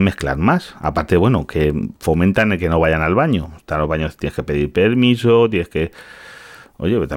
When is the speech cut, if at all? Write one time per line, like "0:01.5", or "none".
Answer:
none